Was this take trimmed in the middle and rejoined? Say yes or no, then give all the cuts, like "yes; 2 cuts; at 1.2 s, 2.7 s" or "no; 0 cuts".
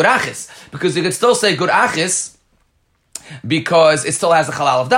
no; 0 cuts